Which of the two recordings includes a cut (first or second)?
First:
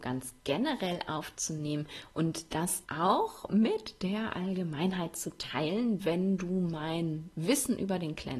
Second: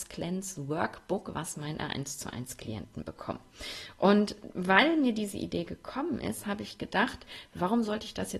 first